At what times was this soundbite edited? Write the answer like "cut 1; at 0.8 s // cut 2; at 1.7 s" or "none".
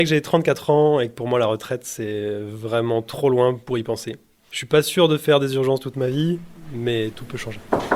none